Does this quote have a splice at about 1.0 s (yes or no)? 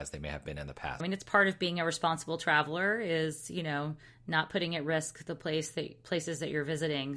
yes